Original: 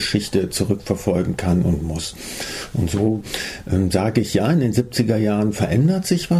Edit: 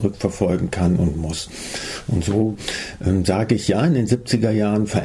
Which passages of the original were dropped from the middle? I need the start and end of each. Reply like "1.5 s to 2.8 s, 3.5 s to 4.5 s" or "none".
none